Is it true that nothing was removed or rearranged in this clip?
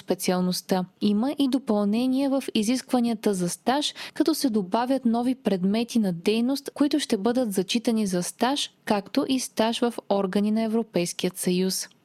no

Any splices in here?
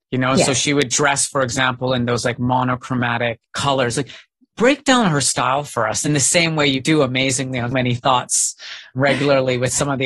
yes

